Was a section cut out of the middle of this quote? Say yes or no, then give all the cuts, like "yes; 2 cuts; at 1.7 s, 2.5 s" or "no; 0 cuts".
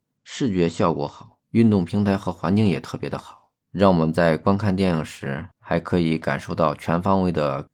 yes; 3 cuts; at 1.4 s, 3.6 s, 5.5 s